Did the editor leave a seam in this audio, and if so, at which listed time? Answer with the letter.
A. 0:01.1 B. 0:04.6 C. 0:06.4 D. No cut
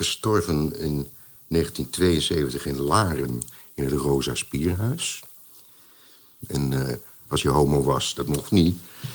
C